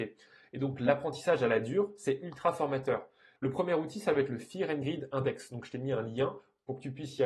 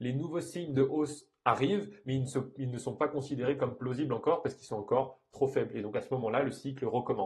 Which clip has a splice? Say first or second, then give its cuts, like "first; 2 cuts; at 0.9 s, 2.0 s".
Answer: first; 1 cut; at 3.4 s